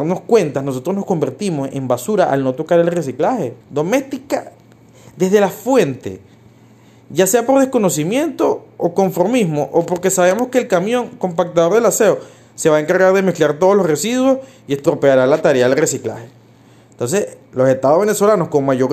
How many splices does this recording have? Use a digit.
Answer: 1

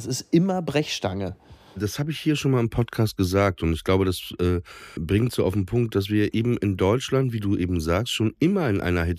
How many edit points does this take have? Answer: 1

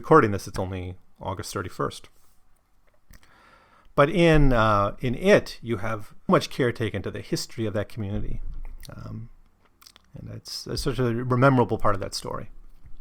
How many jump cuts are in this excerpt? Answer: 1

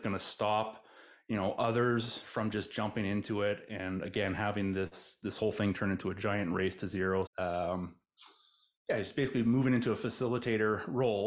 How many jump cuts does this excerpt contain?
1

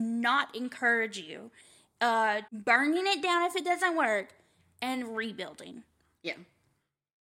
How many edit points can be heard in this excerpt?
1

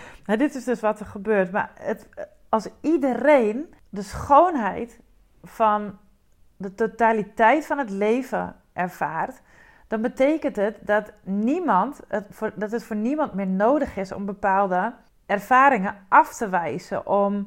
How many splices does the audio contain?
0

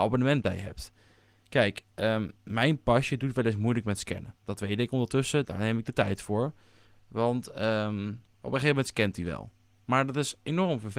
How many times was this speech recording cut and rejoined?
1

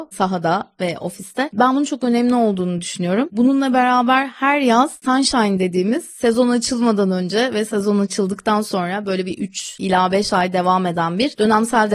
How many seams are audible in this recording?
1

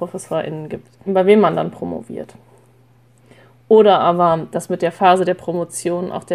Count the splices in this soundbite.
1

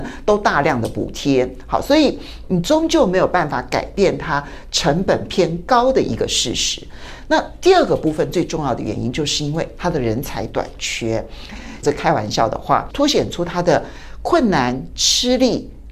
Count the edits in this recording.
1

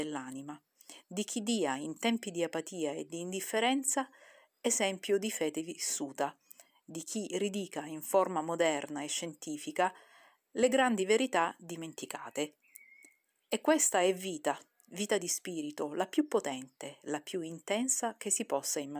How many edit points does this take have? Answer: 0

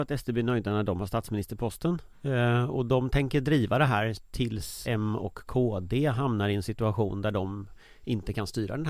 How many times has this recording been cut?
2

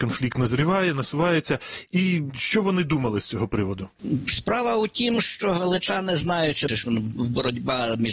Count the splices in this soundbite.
1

